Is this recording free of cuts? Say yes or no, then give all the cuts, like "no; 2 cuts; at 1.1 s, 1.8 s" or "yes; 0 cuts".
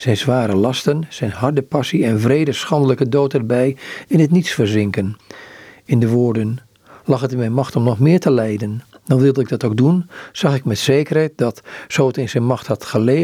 yes; 0 cuts